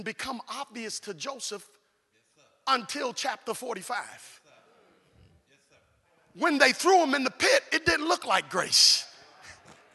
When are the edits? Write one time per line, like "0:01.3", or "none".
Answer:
none

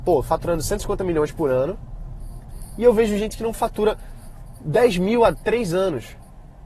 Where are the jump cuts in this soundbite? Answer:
none

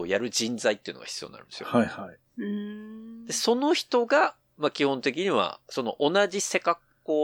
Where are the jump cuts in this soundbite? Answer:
none

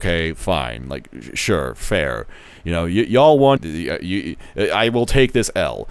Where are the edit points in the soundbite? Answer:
0:03.6

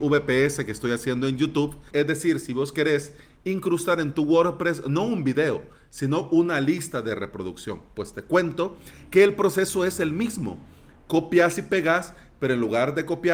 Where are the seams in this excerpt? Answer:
0:01.9

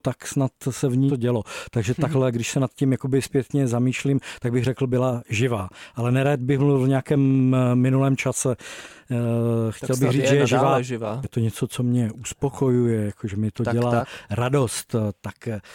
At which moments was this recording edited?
0:01.1
0:11.2

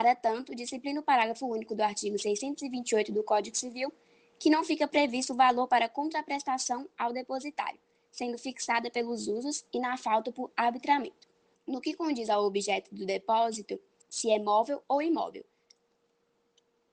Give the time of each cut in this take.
0:11.5
0:14.0

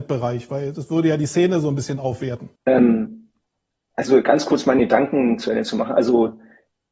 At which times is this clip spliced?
0:02.6

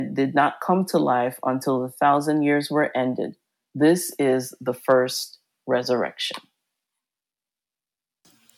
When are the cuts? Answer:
none

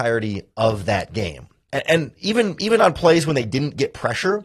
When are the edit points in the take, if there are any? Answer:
0:01.7

